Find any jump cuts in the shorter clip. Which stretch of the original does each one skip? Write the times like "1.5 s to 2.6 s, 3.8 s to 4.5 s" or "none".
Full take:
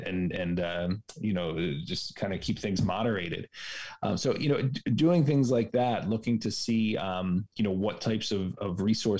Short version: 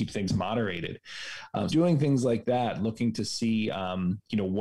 4.2 s to 5.0 s